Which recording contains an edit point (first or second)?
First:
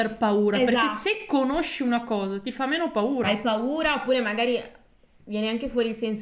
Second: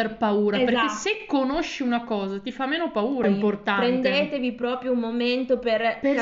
second